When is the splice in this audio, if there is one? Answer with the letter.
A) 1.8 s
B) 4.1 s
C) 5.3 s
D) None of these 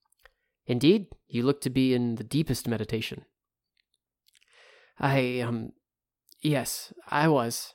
D